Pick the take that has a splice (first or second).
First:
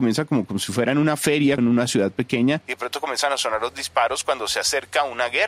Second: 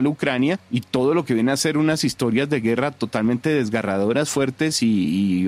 first